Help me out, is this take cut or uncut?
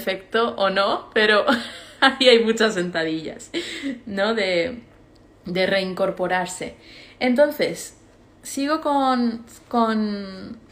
uncut